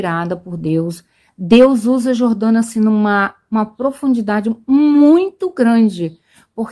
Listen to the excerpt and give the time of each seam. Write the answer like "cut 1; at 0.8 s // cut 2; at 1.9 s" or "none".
none